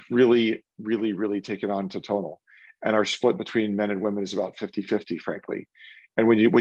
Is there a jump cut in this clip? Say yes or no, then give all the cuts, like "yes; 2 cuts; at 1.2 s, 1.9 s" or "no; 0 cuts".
no; 0 cuts